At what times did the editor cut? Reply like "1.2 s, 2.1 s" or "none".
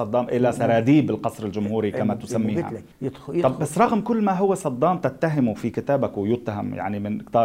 2.9 s